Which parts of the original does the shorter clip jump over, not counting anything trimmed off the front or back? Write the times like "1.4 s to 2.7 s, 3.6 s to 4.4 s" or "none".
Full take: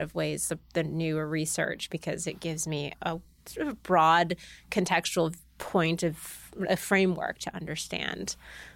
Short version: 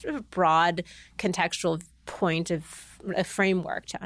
none